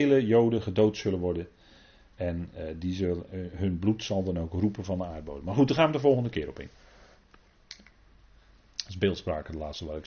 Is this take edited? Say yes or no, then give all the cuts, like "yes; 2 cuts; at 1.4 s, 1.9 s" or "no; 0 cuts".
no; 0 cuts